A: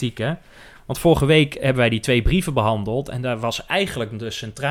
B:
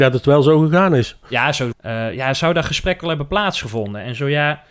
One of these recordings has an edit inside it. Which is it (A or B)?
B